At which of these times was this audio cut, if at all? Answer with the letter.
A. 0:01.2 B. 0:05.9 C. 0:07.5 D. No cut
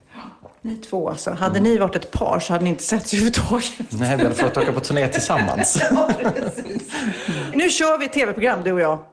C